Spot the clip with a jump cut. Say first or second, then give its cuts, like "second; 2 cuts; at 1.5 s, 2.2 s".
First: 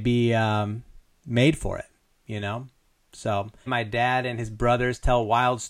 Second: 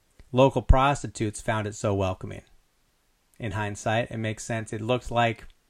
first; 1 cut; at 3.7 s